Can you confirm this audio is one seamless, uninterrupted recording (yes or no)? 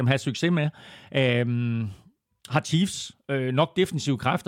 yes